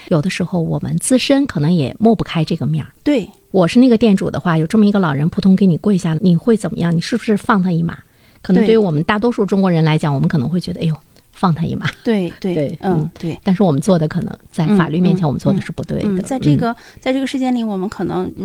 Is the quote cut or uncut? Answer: cut